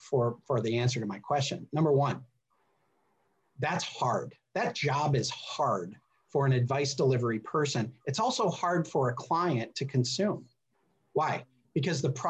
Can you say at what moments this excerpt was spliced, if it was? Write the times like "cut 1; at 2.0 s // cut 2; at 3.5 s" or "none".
none